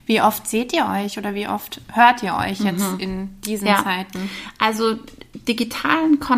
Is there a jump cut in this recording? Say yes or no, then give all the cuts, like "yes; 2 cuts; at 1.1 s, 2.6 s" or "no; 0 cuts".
no; 0 cuts